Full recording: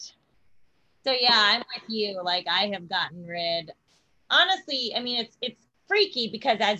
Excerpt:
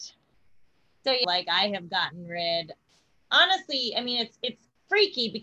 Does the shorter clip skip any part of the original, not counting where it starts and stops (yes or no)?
yes